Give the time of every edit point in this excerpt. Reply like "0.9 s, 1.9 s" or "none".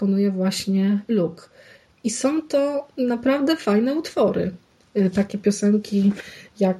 none